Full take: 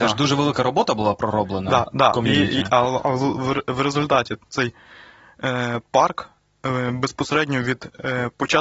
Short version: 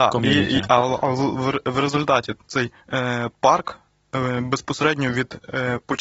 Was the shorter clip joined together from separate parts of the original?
yes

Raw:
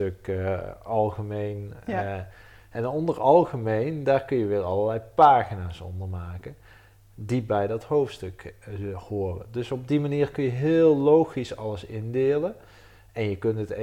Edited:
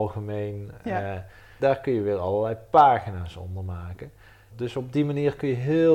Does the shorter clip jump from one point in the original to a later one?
yes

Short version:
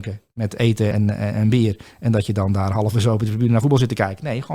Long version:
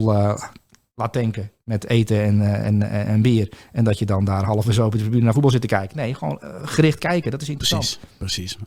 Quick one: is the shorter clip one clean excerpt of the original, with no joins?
no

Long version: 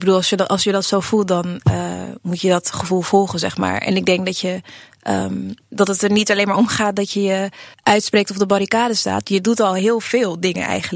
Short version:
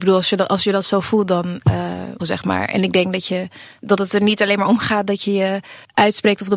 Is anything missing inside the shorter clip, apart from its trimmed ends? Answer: yes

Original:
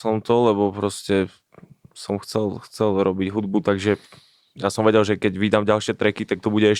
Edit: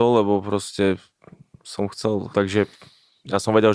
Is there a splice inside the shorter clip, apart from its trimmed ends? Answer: yes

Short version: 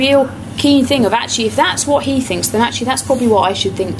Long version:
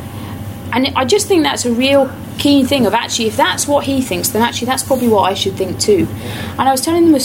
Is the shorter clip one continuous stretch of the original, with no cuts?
yes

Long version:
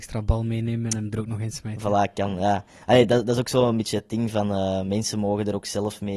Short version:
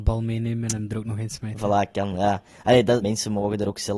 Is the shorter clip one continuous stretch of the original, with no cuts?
no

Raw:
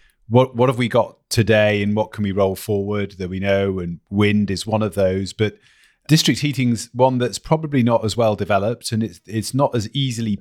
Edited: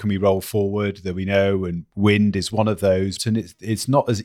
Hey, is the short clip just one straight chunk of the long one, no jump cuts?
no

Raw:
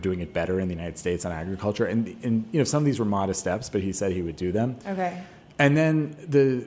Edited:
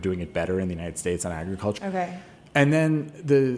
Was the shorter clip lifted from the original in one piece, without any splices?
no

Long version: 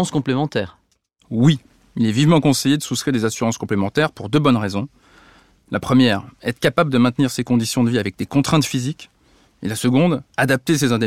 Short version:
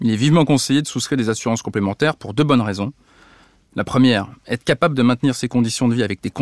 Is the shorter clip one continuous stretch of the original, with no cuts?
yes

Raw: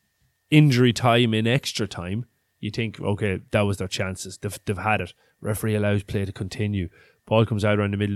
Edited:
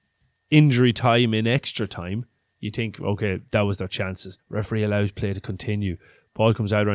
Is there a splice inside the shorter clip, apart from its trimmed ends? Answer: yes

